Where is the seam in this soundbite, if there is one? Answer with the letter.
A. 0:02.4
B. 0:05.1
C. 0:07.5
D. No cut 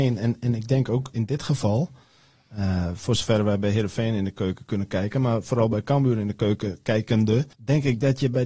C